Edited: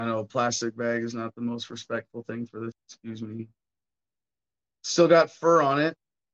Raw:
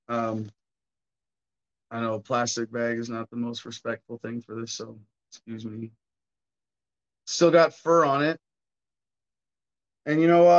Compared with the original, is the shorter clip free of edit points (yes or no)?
no